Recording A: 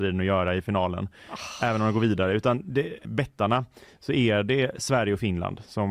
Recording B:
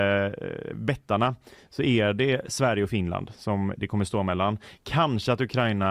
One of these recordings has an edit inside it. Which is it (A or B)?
A